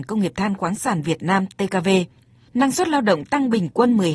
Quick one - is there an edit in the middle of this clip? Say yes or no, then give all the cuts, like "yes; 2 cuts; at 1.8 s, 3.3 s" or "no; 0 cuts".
yes; 1 cut; at 2.5 s